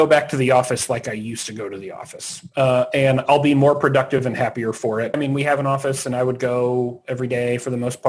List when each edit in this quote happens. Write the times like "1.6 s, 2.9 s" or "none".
5.1 s